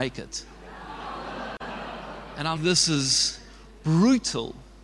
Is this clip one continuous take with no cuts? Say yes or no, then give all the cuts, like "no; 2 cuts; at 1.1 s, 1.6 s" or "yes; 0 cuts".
no; 1 cut; at 2.6 s